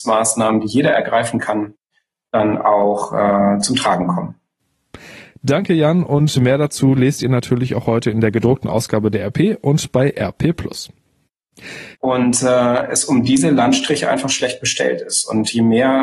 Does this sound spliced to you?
yes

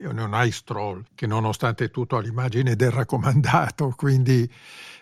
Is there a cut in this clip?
yes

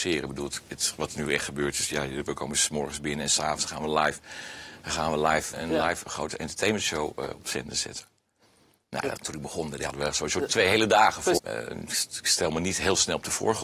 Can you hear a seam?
yes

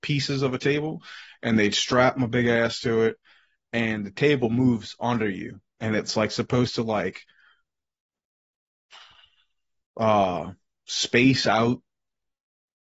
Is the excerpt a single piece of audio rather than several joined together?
yes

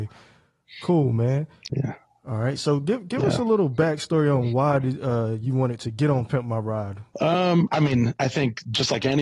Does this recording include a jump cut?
no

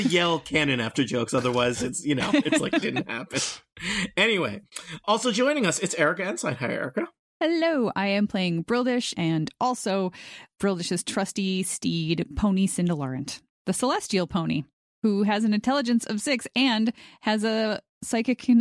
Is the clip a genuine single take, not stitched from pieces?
no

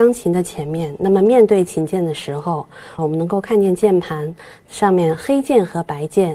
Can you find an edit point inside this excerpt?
yes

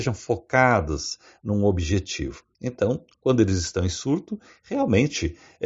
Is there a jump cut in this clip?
no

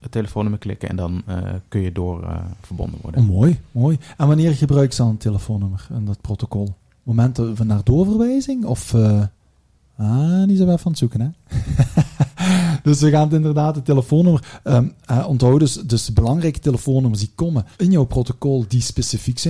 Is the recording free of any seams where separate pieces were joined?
no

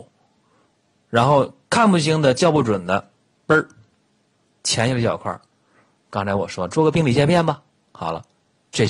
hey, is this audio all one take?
yes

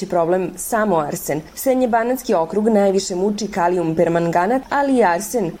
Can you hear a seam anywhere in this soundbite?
no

